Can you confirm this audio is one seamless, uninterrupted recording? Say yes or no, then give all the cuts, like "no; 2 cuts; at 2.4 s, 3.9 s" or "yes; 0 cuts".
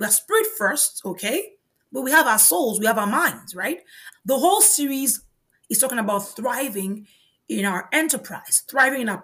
no; 1 cut; at 4.1 s